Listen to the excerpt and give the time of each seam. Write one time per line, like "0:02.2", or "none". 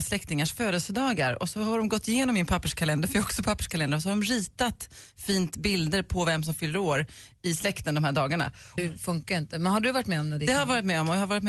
0:08.8